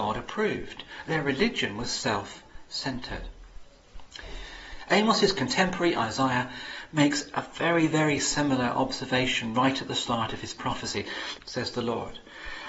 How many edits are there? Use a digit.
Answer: 2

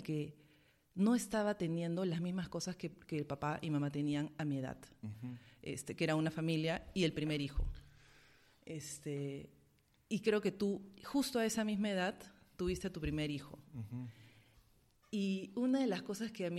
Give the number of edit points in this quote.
0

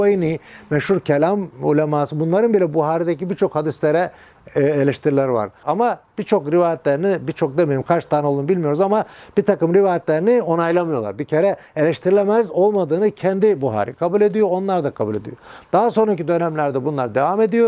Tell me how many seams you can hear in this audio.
1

